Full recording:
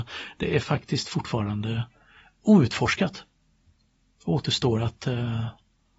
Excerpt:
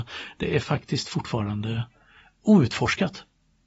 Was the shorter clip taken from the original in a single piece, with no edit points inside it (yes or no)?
yes